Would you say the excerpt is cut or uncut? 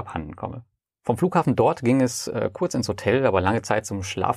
uncut